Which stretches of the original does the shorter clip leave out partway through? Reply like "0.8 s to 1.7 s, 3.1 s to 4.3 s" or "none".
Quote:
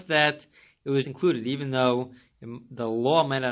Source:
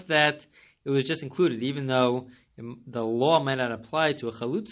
1.0 s to 1.2 s